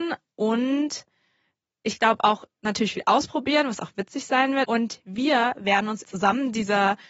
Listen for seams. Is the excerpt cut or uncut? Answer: cut